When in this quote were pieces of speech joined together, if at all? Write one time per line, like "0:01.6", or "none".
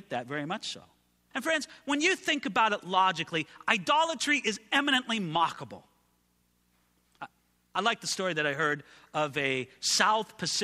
0:01.3